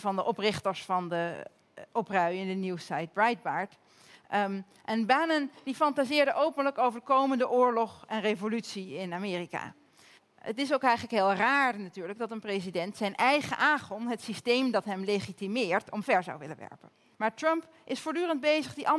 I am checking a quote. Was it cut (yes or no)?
yes